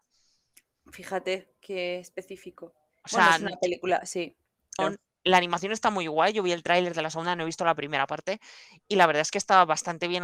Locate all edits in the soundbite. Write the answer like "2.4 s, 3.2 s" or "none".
4.8 s